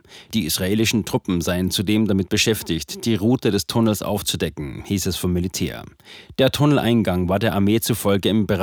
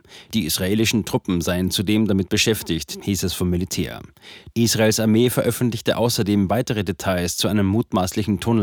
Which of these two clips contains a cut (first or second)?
second